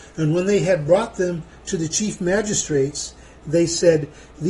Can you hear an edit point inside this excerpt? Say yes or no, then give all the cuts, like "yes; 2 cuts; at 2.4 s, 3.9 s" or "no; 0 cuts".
no; 0 cuts